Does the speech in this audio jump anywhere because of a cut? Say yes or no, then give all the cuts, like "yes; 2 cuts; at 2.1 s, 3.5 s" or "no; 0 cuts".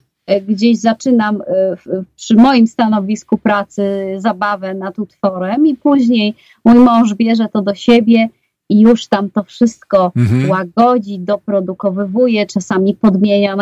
no; 0 cuts